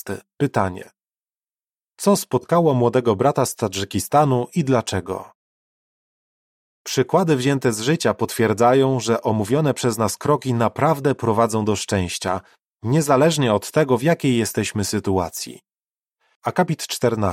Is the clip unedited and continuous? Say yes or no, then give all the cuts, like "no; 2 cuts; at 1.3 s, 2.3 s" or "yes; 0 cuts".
no; 1 cut; at 16.3 s